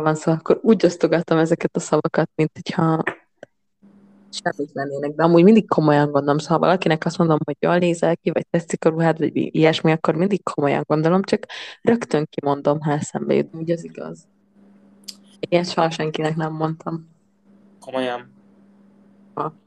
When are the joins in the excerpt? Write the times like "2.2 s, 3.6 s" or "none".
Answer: 13.5 s, 15.3 s